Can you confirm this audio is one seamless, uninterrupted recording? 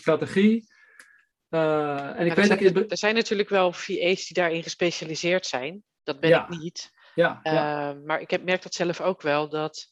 yes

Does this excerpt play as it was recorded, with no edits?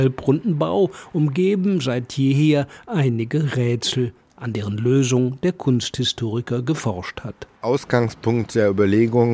yes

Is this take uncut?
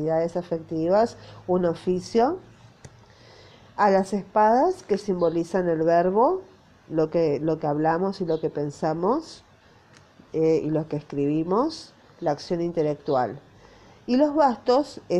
yes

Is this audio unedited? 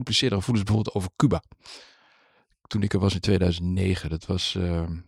yes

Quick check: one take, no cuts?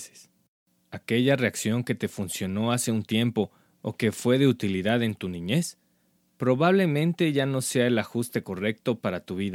yes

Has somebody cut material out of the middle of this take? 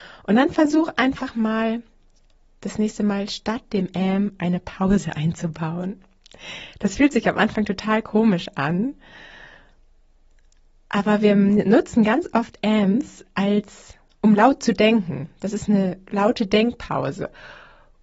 no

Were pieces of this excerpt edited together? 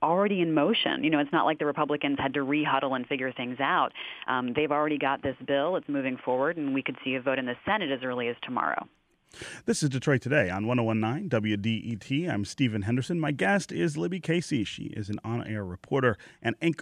no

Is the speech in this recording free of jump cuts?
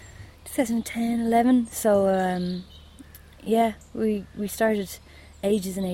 yes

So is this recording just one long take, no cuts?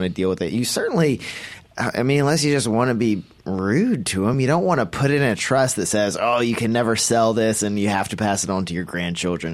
yes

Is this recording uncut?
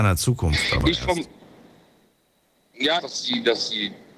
no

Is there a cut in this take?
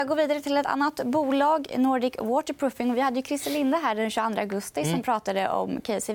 no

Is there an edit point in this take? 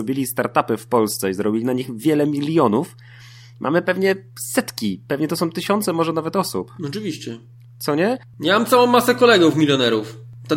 no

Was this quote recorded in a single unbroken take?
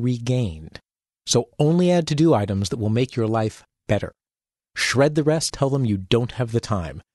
no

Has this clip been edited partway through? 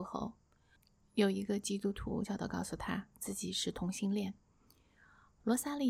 yes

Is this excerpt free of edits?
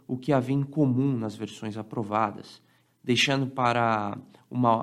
no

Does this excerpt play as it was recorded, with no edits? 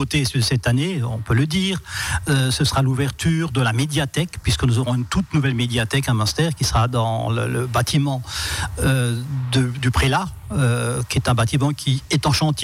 yes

